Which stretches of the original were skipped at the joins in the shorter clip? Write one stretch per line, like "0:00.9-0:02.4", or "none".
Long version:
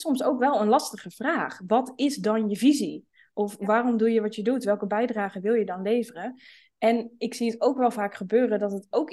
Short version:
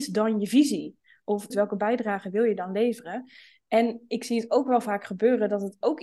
0:03.6-0:04.6